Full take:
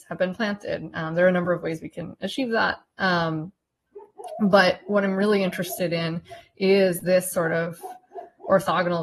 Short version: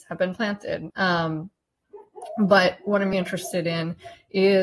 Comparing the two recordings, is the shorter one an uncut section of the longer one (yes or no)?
no